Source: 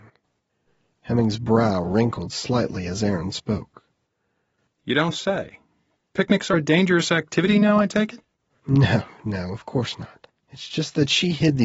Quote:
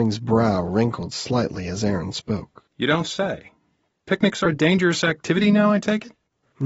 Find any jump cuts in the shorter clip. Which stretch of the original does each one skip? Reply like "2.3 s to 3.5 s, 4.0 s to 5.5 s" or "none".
3.9 s to 4.7 s